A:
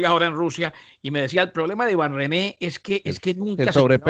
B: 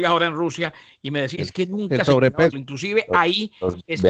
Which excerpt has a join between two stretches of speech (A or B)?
B